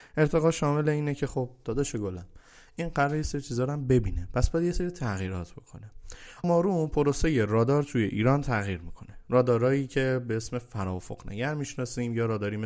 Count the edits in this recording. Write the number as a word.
one